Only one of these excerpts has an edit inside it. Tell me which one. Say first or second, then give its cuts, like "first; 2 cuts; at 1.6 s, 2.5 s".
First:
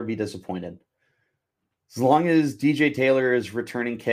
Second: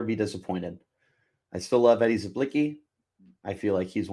second; 1 cut; at 1.4 s